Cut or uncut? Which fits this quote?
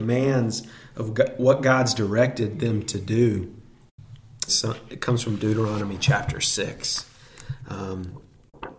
cut